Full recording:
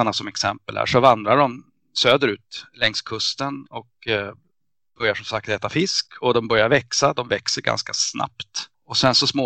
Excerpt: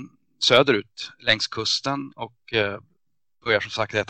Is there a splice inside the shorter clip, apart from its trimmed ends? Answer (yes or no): no